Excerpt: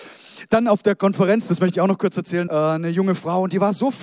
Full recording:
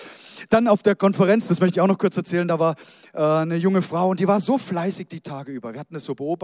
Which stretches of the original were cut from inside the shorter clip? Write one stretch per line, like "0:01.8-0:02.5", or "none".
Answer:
0:02.5-0:03.1